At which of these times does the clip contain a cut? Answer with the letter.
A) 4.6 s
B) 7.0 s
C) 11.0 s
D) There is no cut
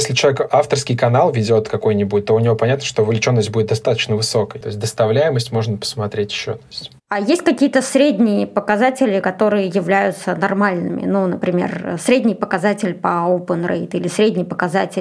A